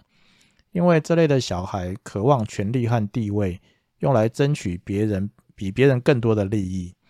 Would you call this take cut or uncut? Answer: uncut